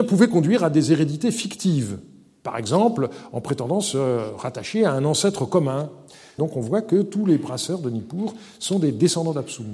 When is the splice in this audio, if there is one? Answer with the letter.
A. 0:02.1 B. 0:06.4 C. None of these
B